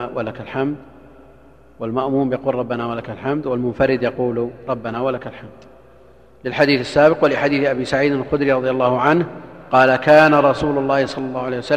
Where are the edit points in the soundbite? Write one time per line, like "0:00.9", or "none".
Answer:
none